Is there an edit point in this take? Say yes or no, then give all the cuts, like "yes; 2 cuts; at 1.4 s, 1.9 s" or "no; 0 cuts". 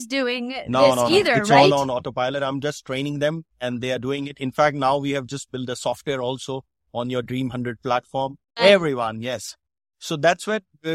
yes; 2 cuts; at 3.5 s, 8.6 s